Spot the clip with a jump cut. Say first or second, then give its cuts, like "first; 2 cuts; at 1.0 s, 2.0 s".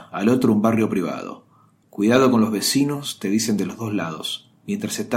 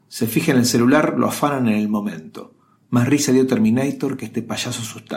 first; 1 cut; at 1.8 s